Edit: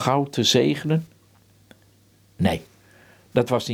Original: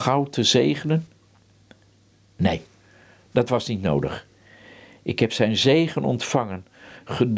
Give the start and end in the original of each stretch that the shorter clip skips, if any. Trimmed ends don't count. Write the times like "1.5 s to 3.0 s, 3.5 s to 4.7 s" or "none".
none